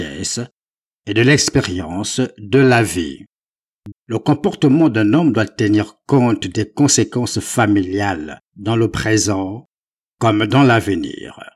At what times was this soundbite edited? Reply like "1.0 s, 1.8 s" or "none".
3.9 s